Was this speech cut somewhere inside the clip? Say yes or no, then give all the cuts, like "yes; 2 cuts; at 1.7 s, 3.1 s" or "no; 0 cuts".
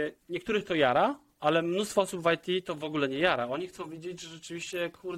no; 0 cuts